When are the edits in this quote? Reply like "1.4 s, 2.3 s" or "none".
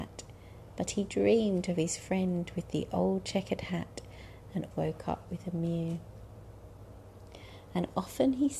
4.7 s